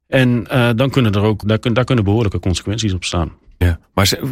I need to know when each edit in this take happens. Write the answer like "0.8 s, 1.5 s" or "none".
1.4 s